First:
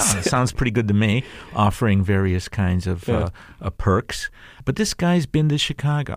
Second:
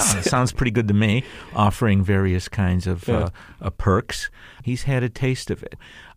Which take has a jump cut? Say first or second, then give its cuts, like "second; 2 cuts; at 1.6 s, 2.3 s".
second; 1 cut; at 4.6 s